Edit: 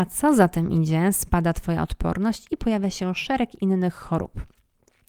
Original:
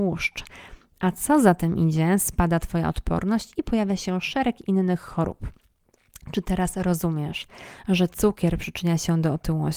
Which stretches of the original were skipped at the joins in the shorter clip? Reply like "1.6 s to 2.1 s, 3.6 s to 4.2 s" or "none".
none